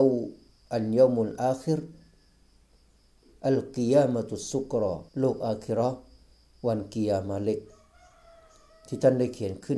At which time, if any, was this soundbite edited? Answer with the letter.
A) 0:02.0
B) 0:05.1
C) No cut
B